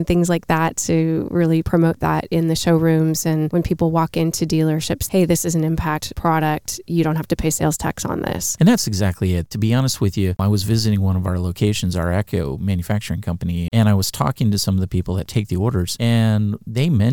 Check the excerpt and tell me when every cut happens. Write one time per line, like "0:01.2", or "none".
0:05.1
0:13.7